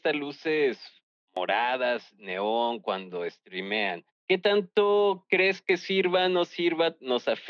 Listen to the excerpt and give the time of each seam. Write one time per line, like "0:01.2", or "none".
none